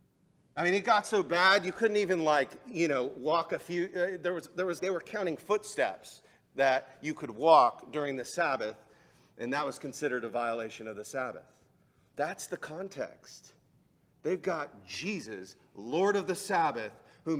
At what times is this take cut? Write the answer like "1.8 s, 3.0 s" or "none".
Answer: 4.8 s, 12.1 s